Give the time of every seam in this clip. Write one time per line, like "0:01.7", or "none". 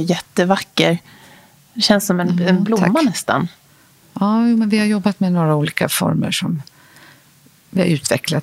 none